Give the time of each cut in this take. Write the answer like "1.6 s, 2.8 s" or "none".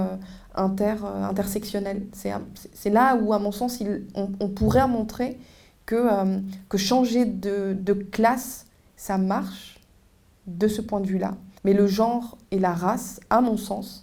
11.6 s